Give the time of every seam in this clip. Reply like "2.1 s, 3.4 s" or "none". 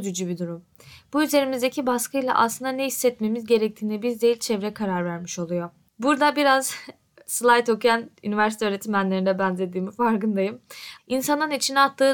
5.9 s, 11.0 s